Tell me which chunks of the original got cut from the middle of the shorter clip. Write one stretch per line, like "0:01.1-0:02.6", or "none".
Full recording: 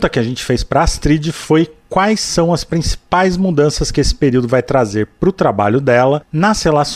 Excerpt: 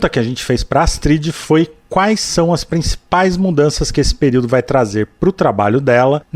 none